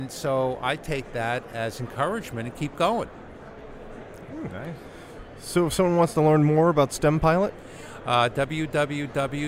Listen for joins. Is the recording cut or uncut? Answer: uncut